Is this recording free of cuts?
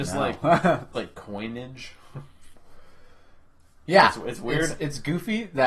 no; 1 cut; at 0.9 s

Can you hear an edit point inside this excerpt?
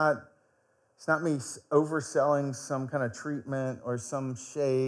no; 0 cuts

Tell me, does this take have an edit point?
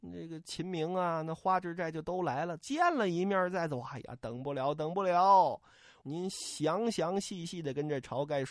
yes; 1 cut; at 6.0 s

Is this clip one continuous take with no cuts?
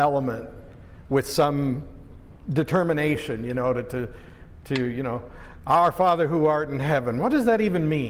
yes; 0 cuts

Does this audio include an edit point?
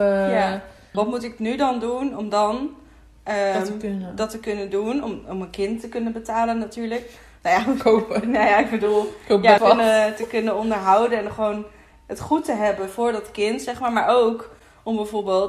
yes; 2 cuts; at 0.9 s, 9.6 s

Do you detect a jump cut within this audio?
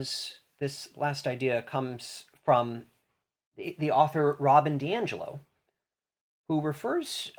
no; 0 cuts

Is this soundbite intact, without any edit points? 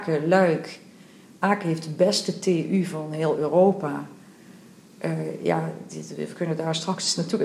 yes; 0 cuts

